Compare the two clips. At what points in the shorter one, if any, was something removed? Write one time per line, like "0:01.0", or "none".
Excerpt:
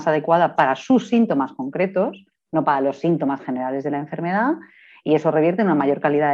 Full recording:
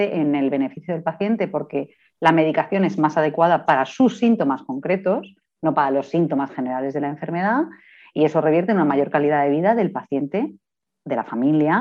none